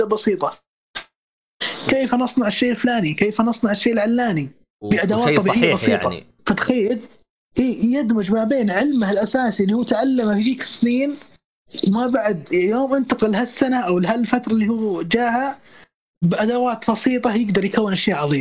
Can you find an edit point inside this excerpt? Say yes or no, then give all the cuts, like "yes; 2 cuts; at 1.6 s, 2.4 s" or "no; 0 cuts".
no; 0 cuts